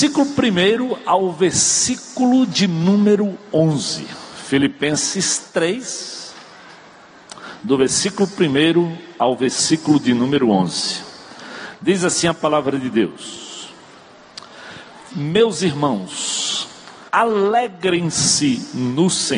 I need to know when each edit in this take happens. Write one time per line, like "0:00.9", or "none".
0:15.1
0:17.1